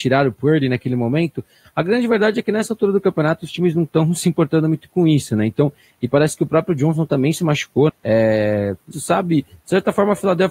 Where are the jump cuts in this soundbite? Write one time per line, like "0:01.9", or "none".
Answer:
0:07.9
0:08.9